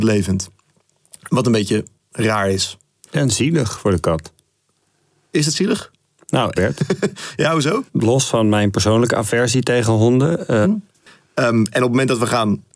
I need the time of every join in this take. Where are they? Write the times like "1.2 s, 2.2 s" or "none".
6.6 s, 7.9 s, 10.6 s